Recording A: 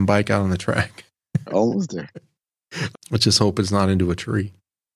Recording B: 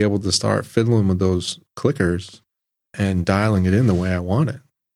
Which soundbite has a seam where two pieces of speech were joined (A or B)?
A